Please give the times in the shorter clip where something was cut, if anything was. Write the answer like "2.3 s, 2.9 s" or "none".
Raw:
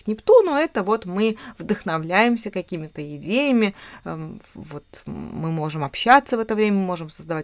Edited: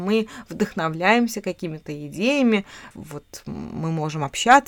2.9 s

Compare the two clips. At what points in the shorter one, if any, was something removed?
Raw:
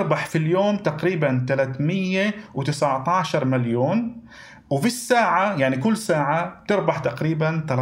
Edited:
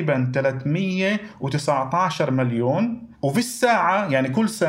3.1 s

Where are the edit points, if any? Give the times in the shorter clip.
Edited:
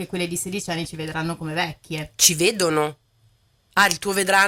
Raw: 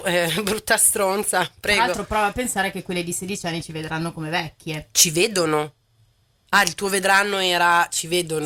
none

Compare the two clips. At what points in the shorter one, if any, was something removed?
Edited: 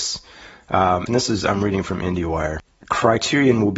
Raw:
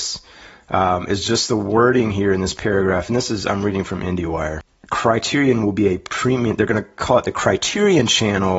1.1 s

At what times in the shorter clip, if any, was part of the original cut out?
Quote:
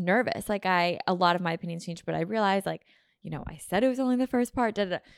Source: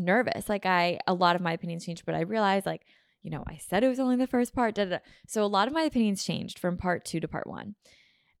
none

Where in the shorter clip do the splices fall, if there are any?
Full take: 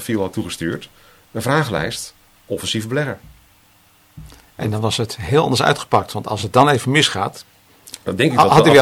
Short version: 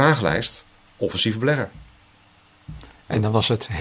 none

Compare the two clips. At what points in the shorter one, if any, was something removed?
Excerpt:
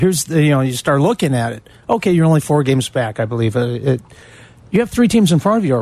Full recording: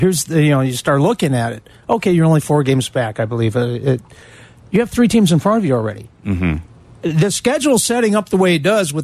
none

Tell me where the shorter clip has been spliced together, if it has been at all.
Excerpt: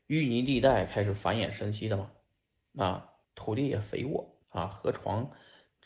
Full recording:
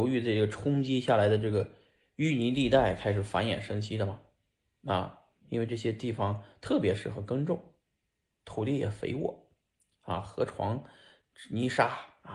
3.2 s, 4.4 s

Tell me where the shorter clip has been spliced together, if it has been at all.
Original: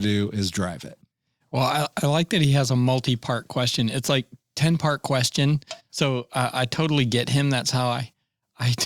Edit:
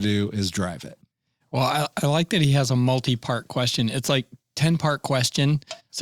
none

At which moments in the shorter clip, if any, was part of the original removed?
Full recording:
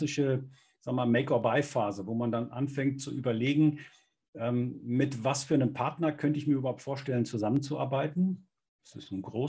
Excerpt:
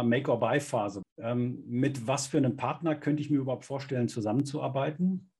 1.0 s

